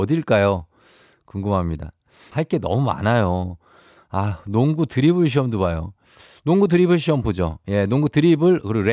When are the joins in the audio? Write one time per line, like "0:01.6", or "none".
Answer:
0:02.3